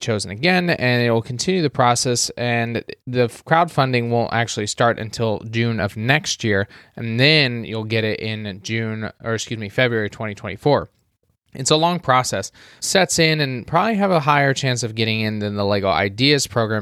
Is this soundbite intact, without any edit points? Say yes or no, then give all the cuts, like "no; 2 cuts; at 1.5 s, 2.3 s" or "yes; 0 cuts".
no; 1 cut; at 12.8 s